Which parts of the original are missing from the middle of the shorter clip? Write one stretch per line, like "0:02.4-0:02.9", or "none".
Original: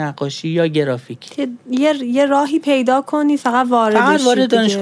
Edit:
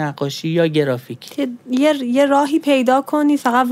none